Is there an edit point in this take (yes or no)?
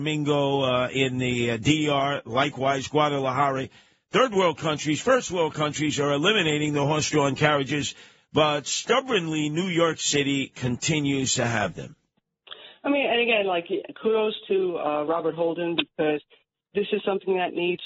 no